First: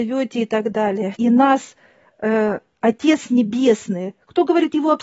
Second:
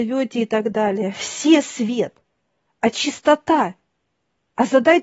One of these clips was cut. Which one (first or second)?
first